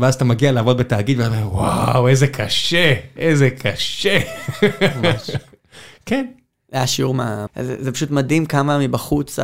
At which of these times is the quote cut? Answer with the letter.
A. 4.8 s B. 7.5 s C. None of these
B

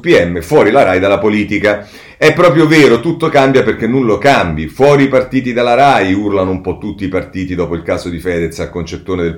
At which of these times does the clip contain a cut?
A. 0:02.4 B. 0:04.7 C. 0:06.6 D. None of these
D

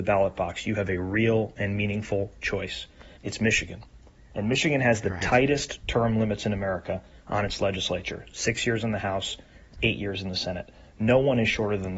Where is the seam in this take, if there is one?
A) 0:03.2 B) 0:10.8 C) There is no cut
A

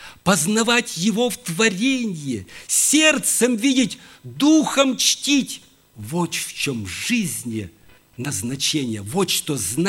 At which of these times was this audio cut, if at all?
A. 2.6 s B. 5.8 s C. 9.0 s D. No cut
D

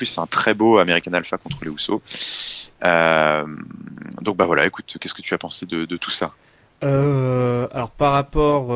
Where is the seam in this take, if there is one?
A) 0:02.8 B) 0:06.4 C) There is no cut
C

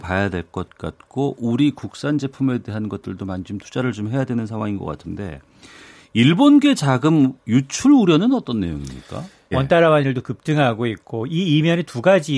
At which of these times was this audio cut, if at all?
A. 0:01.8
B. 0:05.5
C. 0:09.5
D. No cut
C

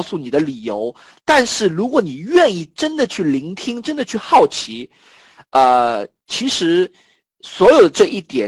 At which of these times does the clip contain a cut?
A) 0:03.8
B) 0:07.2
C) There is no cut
C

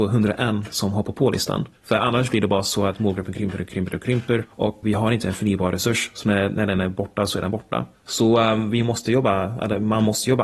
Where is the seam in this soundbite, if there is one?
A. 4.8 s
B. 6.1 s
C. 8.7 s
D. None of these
A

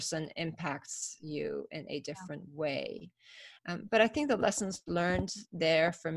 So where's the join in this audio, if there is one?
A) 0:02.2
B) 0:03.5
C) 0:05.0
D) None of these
D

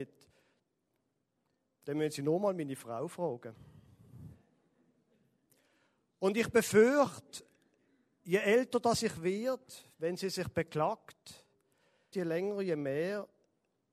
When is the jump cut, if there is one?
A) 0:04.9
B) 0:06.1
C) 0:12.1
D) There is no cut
C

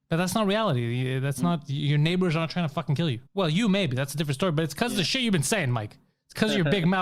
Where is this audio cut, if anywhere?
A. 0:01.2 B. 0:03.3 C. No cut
B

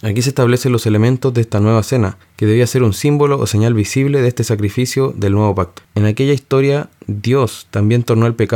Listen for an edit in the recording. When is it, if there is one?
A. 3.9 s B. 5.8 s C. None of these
B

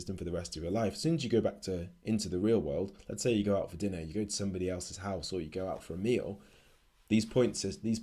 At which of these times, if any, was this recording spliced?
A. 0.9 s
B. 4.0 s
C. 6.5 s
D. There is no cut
D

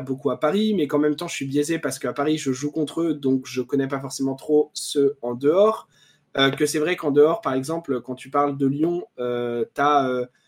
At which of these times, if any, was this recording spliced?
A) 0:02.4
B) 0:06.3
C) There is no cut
C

